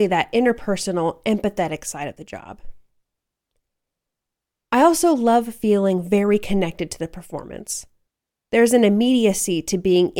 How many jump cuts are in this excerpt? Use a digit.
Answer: 0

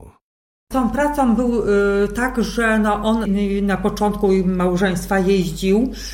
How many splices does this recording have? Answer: 1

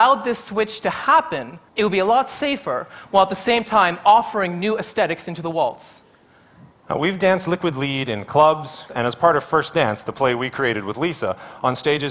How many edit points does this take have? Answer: 3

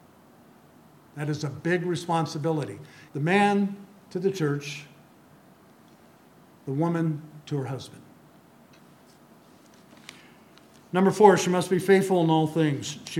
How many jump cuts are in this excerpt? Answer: 1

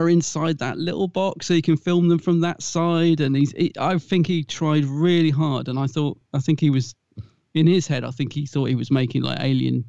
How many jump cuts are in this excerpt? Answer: 0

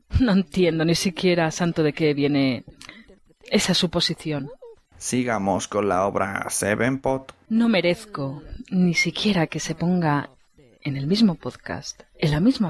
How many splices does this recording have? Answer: 1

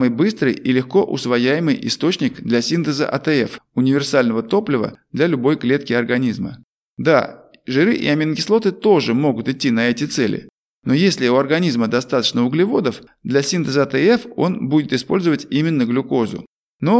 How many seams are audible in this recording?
0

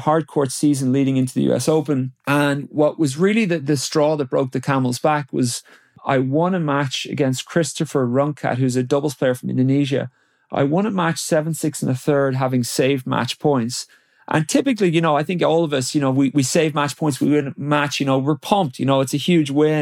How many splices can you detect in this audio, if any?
0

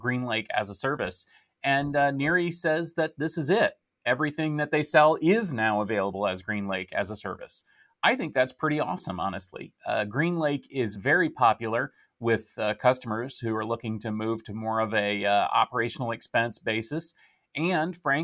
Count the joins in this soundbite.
0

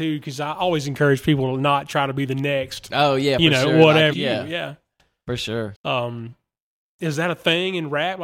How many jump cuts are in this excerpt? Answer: 2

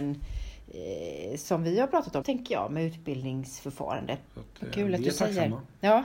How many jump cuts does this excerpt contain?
2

